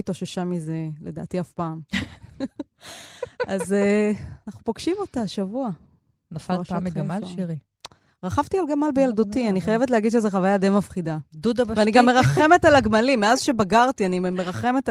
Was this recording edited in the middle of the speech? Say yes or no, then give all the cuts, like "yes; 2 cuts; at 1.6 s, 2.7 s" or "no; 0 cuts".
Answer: no; 0 cuts